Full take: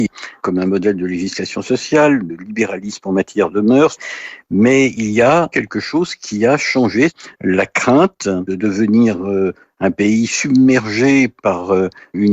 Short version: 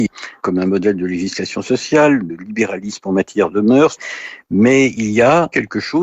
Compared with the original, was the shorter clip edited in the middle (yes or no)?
no